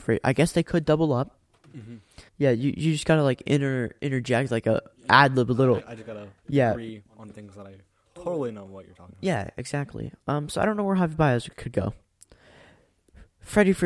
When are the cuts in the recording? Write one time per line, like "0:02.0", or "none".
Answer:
0:02.3
0:05.8